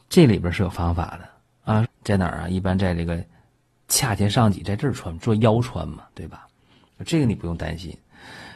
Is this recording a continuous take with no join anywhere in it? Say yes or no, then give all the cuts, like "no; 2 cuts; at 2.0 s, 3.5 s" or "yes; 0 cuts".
no; 1 cut; at 1.8 s